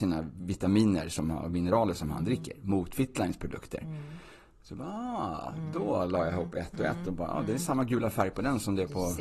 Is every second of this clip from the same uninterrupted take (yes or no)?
yes